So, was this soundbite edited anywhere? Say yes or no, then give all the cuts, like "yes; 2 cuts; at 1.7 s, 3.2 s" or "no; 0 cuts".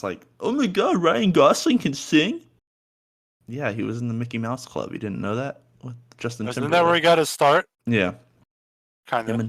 yes; 1 cut; at 7.7 s